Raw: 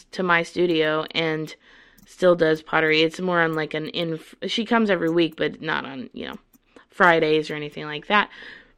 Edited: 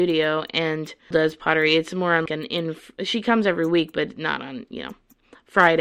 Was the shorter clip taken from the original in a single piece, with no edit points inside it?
no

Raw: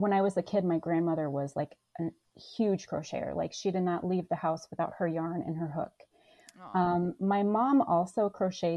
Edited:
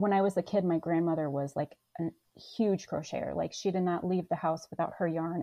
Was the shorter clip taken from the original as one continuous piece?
yes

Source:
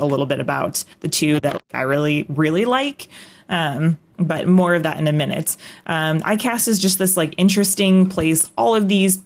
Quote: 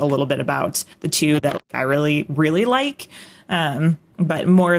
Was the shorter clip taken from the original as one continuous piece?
yes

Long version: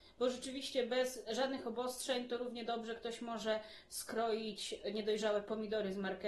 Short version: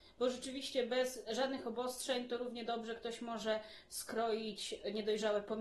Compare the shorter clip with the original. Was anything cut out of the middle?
no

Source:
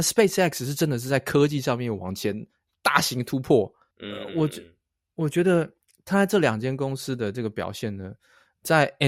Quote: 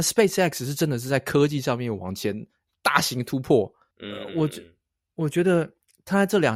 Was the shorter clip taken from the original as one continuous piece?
yes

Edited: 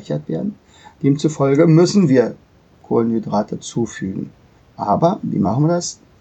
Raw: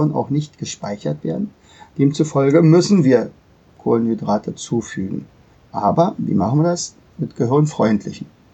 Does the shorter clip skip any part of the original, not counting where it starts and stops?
no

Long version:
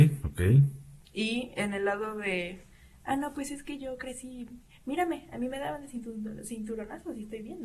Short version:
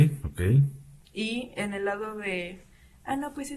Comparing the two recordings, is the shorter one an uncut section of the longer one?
yes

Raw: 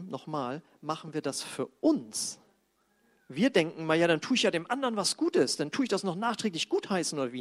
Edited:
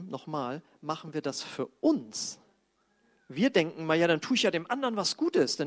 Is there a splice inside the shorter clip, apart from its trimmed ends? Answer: no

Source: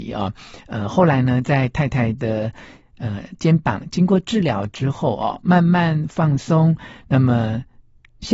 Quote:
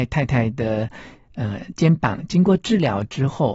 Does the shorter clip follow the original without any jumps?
yes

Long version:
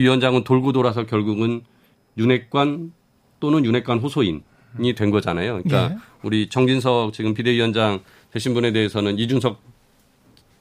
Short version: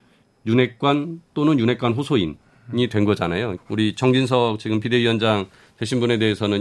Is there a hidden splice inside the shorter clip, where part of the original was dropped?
yes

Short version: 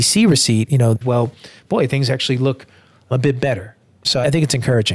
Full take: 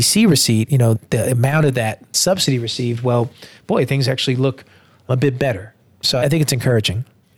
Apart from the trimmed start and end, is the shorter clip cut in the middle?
yes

